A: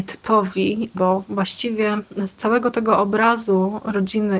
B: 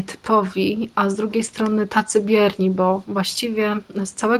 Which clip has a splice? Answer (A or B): A